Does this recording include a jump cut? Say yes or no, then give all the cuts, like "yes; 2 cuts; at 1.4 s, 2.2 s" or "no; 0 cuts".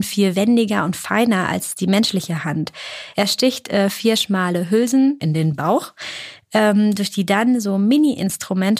yes; 1 cut; at 5.2 s